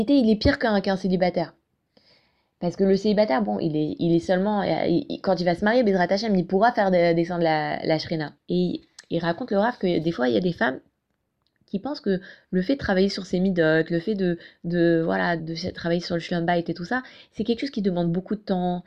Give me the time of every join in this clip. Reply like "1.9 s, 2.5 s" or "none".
8.4 s, 15.4 s

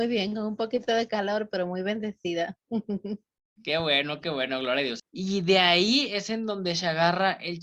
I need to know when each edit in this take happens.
5.0 s

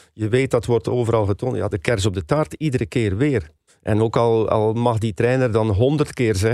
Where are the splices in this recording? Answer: 1.7 s, 3.7 s

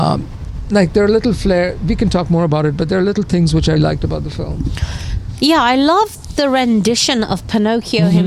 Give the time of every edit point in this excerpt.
3.8 s

